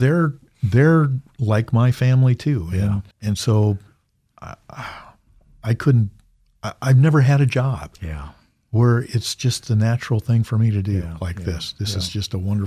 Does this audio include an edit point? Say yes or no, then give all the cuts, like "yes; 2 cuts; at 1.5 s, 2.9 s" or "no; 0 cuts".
yes; 1 cut; at 3.1 s